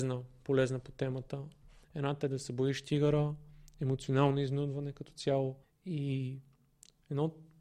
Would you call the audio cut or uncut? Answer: cut